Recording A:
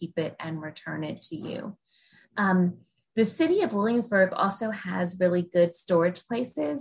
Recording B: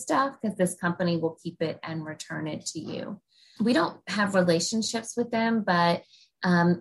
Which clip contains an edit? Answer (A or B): B